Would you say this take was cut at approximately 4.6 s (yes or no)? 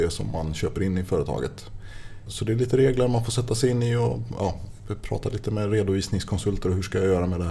no